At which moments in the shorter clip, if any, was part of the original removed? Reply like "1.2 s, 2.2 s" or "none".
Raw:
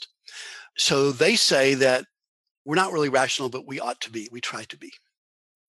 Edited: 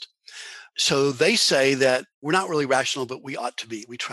2.1 s